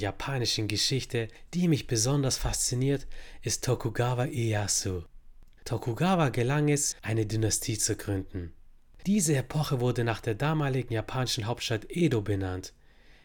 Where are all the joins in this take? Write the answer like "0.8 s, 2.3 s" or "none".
5.6 s, 6.9 s, 9.0 s

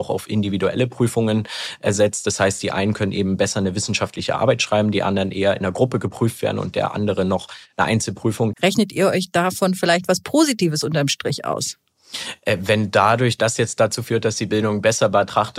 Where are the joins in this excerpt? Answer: 8.5 s

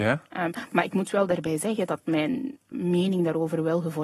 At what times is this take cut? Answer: 2.7 s

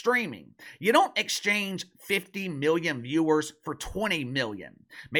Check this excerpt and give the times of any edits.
none

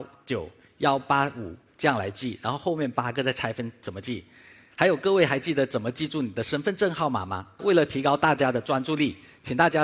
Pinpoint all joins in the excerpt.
7.6 s

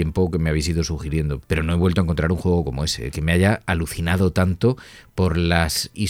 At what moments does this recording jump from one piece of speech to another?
1.4 s

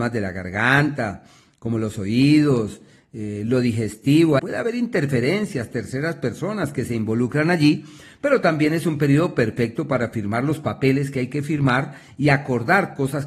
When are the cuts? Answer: 4.4 s

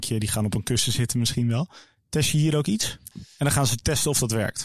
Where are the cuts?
3.1 s

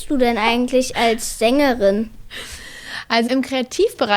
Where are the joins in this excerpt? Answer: 3.3 s

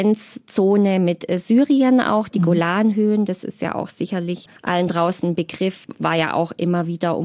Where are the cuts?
4.6 s

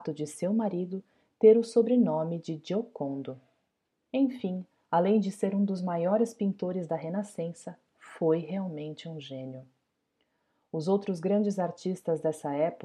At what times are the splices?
3.9 s

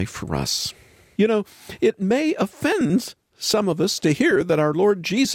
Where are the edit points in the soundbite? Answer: 1.2 s

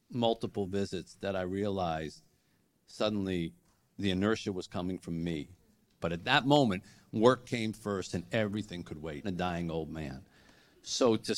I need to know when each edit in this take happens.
6.0 s, 9.2 s

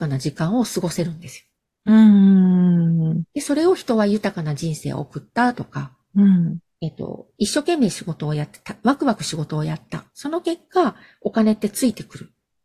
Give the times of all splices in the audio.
6.8 s

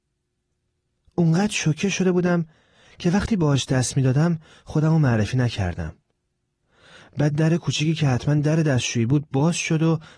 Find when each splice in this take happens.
none

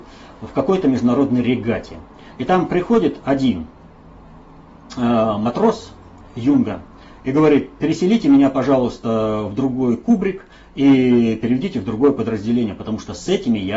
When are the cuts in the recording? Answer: none

